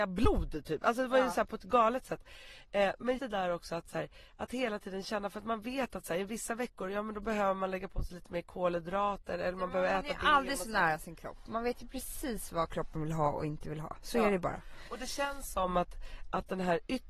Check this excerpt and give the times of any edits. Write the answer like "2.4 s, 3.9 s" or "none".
3.2 s